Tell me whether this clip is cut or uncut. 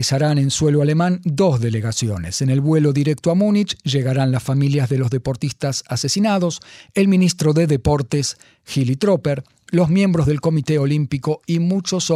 uncut